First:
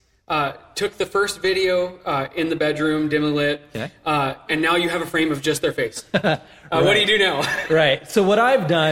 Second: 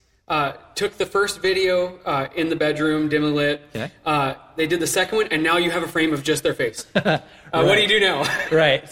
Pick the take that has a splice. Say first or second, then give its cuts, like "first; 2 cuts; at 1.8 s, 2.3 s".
first; 1 cut; at 4.5 s